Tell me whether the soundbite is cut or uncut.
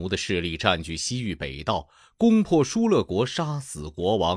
uncut